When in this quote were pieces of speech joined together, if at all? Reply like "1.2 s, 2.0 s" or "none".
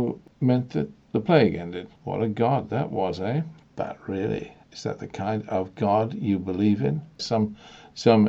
3.6 s, 7.2 s